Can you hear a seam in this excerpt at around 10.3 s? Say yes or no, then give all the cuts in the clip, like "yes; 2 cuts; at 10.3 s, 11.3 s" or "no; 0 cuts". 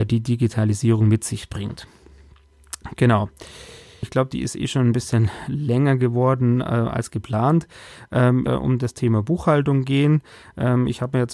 no; 2 cuts; at 4.0 s, 8.5 s